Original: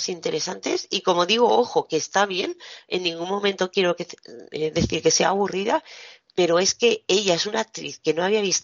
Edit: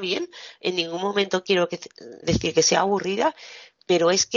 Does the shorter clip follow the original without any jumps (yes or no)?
no